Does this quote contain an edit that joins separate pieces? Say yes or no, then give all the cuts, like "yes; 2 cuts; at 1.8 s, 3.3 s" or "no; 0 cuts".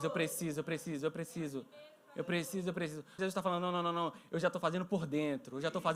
yes; 1 cut; at 3.2 s